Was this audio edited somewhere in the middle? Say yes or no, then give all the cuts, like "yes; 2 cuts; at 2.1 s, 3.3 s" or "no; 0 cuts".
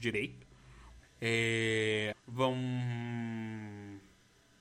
yes; 2 cuts; at 1.0 s, 2.1 s